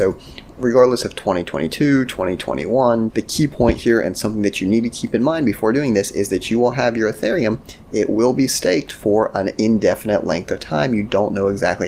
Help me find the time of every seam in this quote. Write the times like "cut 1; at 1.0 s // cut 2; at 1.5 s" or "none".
cut 1; at 3.1 s